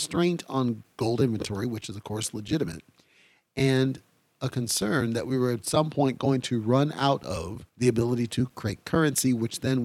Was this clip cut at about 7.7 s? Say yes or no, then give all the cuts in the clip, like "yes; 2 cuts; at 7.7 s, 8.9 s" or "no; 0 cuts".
yes; 1 cut; at 7.7 s